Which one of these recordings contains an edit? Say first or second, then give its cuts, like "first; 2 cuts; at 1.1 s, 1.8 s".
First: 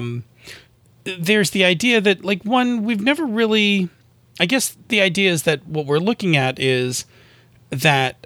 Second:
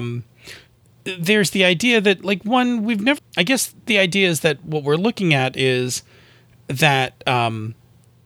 second; 1 cut; at 3.2 s